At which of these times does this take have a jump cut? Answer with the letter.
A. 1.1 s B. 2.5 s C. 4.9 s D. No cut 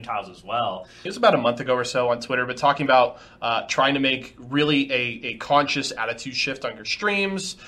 A